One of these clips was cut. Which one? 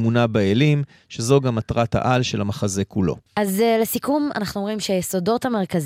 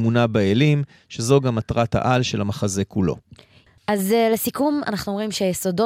first; 1 cut; at 3.3 s

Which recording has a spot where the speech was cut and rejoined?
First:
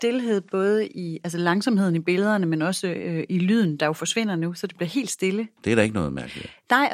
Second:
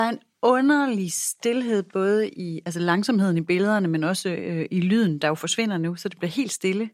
first; 1 cut; at 5.6 s

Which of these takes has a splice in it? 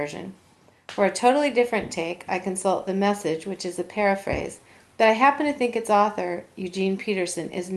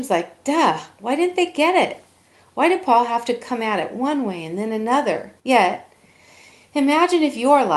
second; 1 cut; at 5.4 s

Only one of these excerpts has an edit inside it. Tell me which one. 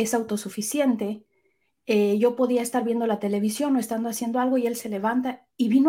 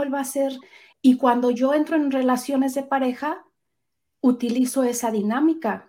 second; 1 cut; at 0.9 s

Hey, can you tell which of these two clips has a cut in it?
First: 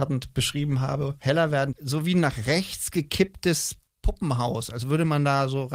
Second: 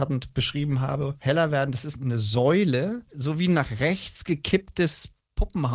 first; 1 cut; at 1.7 s

